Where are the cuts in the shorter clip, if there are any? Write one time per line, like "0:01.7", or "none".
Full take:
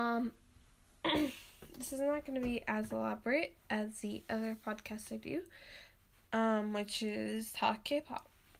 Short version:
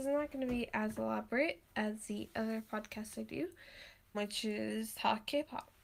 0:04.1